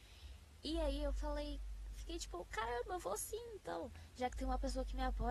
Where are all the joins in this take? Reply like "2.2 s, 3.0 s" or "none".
none